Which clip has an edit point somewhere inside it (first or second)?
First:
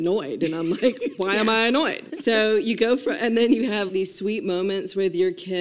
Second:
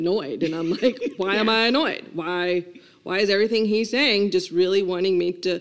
first